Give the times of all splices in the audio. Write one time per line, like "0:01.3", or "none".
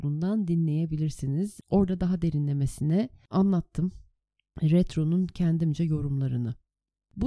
none

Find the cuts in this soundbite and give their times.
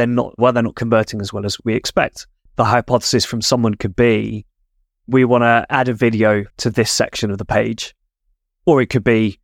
0:02.5
0:06.5

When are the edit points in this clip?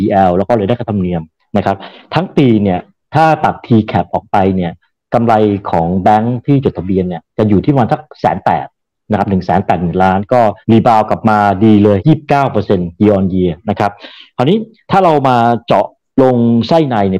0:10.6
0:12.0

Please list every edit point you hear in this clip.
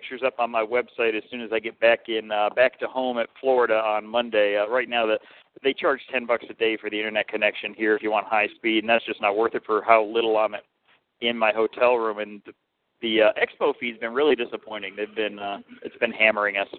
0:15.8

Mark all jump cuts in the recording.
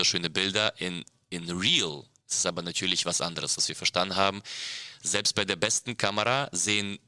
0:03.6

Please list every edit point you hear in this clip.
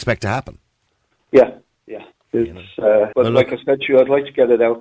0:03.1

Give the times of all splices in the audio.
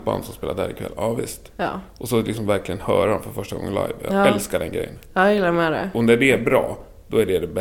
none

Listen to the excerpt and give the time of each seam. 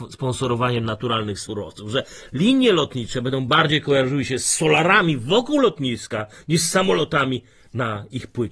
none

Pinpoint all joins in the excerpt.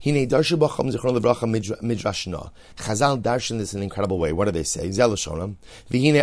none

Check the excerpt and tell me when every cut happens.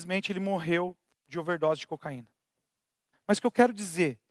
0:03.1

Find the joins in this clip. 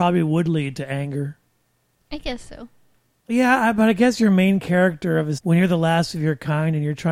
0:03.2
0:05.4

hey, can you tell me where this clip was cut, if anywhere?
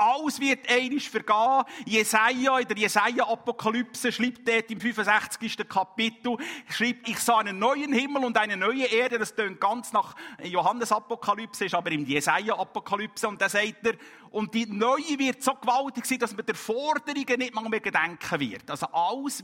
0:07.0

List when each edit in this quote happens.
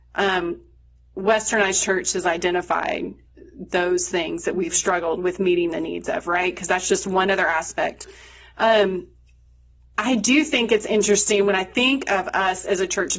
none

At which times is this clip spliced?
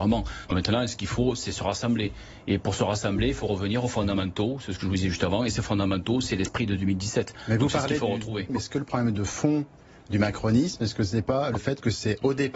0:08.5

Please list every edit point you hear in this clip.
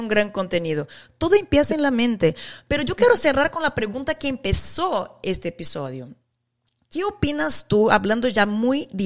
none

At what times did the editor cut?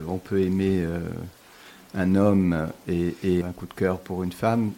0:03.4

